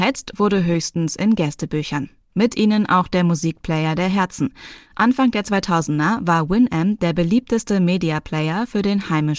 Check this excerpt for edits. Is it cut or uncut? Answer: cut